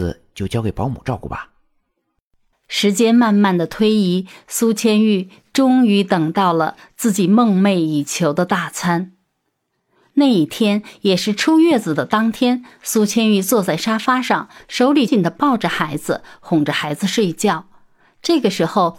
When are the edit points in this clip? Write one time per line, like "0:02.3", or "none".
0:02.5
0:15.1